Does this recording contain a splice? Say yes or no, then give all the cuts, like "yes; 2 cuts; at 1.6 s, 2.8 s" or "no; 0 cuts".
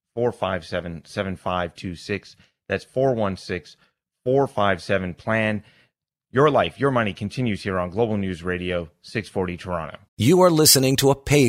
yes; 1 cut; at 10.1 s